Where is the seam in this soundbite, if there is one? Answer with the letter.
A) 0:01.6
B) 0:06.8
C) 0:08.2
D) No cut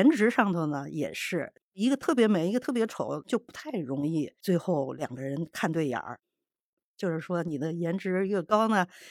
A